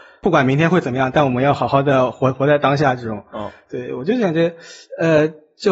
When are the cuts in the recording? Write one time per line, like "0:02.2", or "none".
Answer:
none